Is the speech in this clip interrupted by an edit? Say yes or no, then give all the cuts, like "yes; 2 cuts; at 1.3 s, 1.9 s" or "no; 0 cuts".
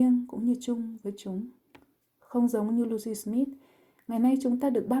no; 0 cuts